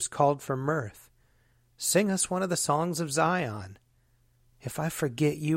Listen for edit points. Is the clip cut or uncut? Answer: cut